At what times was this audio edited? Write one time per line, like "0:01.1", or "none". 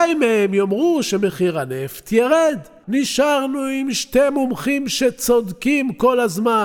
0:02.8